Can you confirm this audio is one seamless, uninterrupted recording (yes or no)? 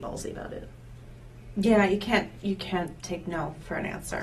yes